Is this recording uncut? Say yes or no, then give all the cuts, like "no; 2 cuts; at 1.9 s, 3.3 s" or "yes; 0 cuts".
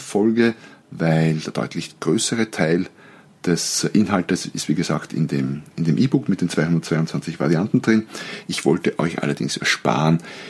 yes; 0 cuts